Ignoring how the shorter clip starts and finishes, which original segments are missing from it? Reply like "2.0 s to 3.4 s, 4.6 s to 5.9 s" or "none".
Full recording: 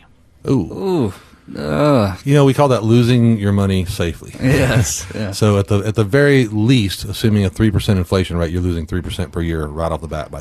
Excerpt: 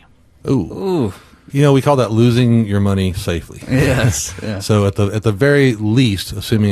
1.5 s to 2.2 s